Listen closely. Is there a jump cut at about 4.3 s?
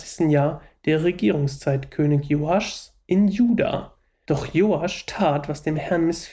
yes; 1 cut; at 4.3 s

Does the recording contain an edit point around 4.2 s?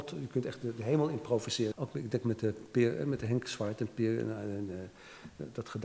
no; 1 cut; at 1.7 s

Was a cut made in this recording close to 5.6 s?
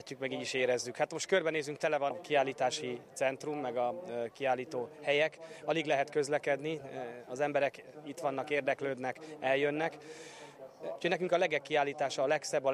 no; 2 cuts; at 2.1 s, 11.0 s

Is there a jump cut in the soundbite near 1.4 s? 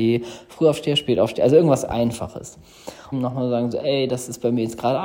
no; 1 cut; at 3.1 s

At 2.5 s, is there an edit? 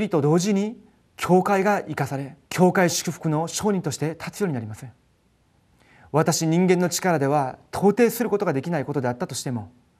yes; 1 cut; at 2.5 s

